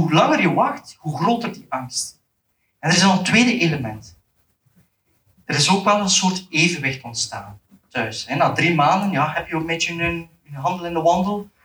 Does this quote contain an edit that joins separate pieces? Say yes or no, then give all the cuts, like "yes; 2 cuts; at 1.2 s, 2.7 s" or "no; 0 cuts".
no; 0 cuts